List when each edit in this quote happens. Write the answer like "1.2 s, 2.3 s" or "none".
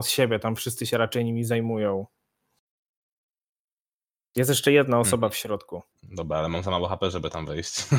5.9 s

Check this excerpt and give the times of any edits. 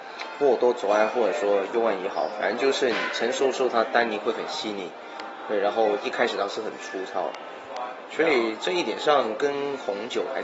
none

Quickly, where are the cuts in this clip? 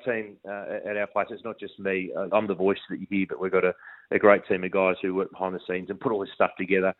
2.3 s

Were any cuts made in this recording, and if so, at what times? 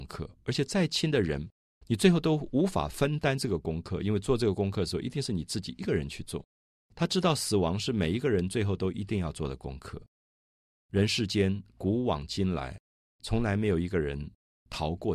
6.9 s

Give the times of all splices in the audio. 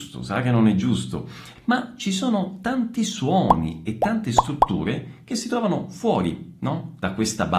1.6 s

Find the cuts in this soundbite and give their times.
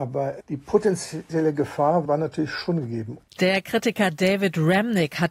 3.3 s

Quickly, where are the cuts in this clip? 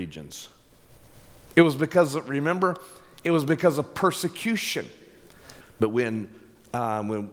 5.6 s

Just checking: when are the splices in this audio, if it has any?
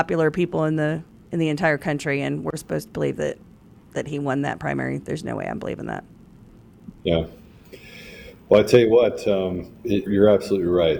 7.0 s, 10.1 s

